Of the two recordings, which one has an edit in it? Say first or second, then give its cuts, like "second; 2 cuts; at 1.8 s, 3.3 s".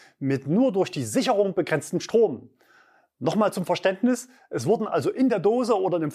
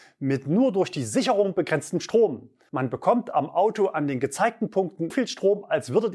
second; 2 cuts; at 2.7 s, 5.1 s